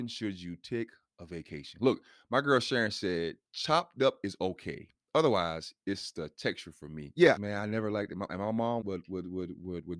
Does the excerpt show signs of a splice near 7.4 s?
yes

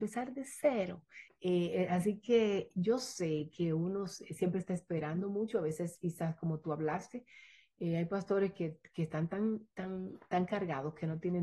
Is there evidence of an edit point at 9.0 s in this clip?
no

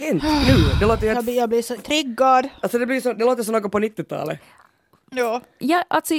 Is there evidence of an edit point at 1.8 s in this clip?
yes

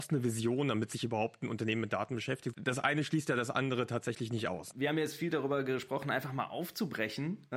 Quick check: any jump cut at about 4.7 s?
yes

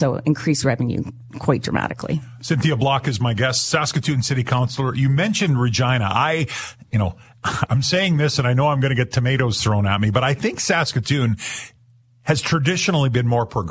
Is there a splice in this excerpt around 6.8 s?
no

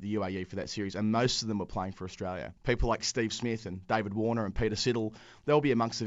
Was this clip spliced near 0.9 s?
no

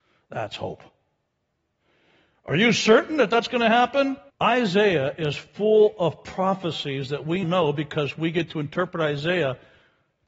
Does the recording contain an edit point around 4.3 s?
yes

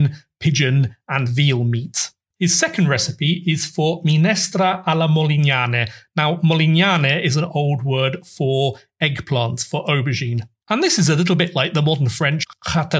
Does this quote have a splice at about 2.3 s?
yes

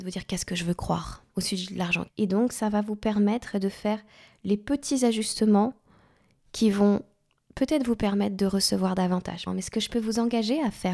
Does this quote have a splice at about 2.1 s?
yes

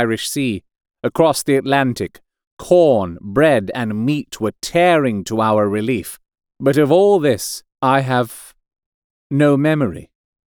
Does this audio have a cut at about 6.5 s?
yes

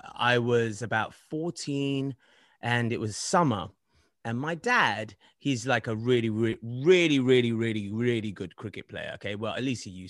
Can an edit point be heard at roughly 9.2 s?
no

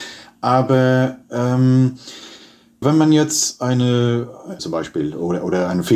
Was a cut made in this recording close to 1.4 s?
no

